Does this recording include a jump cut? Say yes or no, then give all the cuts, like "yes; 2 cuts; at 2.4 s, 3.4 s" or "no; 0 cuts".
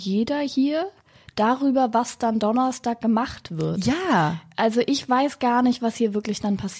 no; 0 cuts